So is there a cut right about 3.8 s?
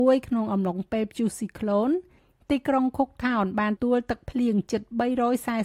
yes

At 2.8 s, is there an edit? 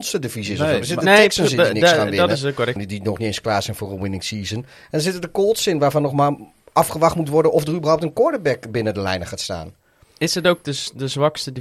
yes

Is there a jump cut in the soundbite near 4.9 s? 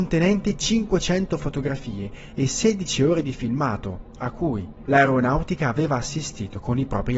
yes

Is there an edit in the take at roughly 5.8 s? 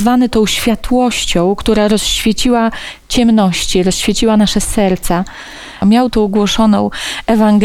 yes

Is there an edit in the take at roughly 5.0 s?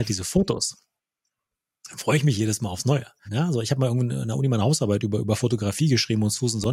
no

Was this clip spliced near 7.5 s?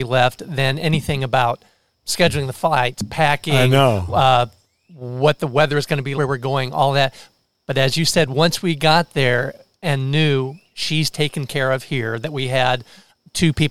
no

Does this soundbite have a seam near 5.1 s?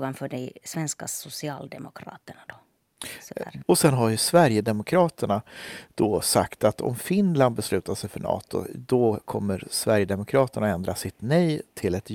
no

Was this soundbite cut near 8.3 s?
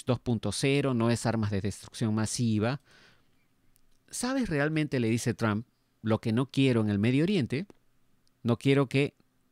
yes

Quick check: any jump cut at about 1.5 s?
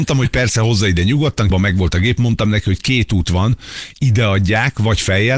yes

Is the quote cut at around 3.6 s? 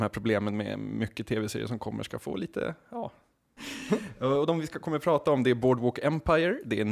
yes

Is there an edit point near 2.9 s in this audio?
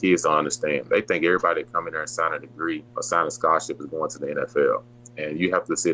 yes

